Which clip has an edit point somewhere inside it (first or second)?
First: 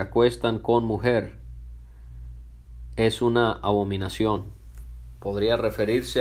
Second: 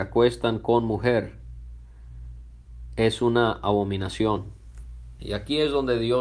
second